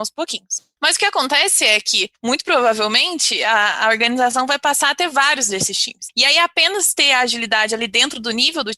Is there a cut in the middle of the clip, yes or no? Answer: no